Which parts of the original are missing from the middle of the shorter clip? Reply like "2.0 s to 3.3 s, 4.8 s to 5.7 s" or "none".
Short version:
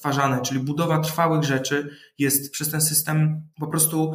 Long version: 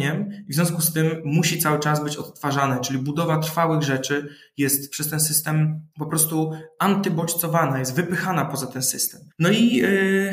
none